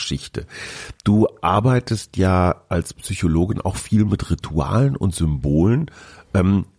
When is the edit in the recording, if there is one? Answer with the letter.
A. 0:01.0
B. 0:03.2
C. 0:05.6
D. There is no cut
D